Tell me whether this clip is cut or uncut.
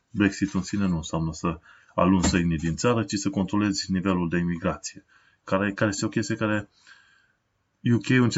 cut